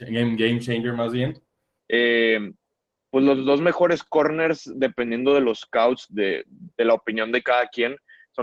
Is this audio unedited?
no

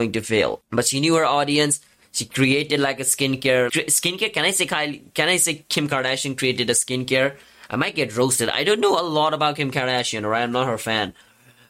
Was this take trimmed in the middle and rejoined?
yes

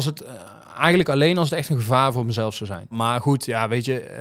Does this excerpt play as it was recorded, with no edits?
no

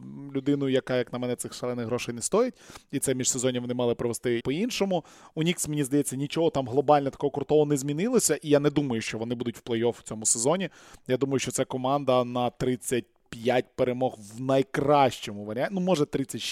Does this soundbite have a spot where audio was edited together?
yes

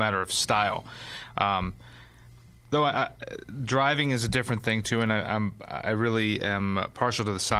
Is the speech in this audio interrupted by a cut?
no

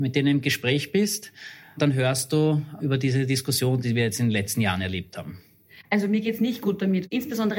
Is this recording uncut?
yes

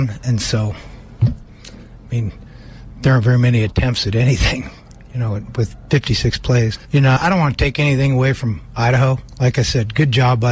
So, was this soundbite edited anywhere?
yes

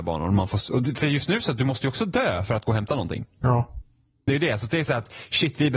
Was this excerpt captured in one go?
yes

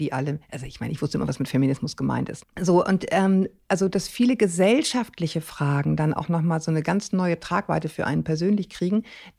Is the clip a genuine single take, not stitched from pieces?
no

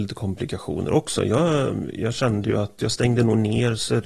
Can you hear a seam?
yes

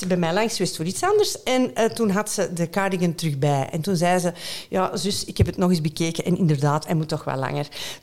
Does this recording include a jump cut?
no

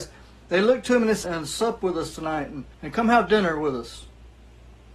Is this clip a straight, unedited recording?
no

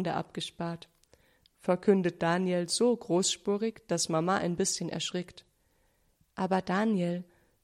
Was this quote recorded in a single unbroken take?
yes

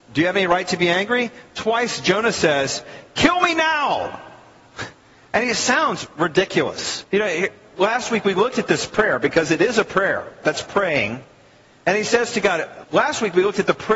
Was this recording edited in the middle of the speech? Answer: yes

